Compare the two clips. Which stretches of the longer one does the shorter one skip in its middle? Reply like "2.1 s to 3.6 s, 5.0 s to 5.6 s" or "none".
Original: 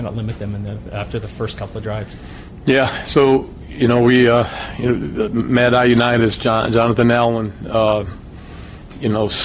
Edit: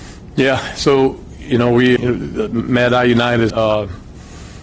4.3 s to 4.8 s, 6.3 s to 7.7 s